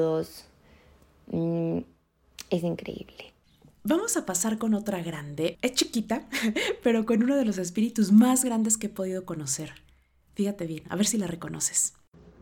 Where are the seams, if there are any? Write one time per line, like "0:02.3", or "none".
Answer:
0:05.5